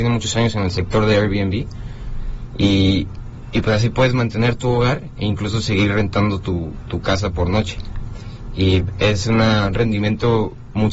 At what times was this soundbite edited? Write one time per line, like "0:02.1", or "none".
none